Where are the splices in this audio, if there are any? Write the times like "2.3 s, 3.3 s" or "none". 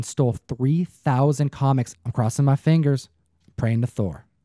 1.9 s